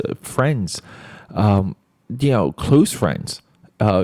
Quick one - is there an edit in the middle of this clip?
no; 0 cuts

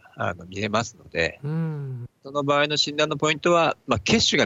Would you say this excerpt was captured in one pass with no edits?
yes; 0 cuts

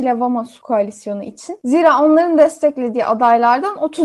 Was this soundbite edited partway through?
no; 0 cuts

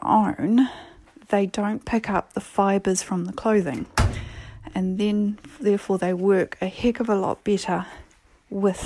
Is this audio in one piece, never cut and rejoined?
yes; 0 cuts

